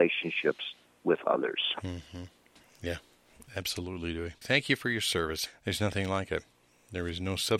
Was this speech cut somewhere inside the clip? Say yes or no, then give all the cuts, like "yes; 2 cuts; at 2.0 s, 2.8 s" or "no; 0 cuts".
yes; 2 cuts; at 4.4 s, 5.5 s